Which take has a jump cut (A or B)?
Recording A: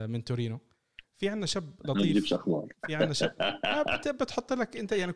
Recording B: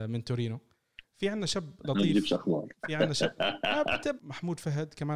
B